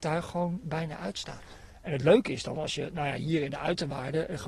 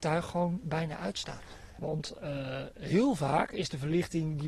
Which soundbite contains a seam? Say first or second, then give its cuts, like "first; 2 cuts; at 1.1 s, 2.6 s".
second; 1 cut; at 1.8 s